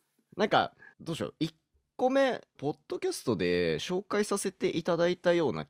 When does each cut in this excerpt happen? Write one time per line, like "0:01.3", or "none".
0:00.9
0:02.6